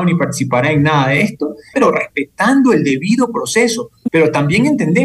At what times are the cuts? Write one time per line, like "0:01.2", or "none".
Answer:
0:01.7
0:04.1